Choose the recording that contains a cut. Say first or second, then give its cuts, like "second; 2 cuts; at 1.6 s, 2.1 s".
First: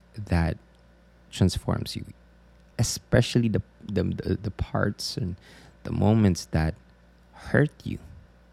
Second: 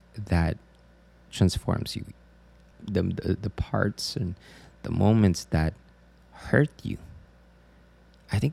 second; 1 cut; at 2.7 s